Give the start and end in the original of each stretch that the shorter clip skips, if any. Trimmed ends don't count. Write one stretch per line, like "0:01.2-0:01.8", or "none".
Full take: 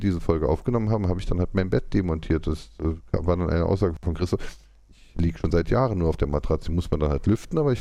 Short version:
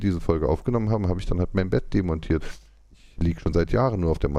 0:02.4-0:04.4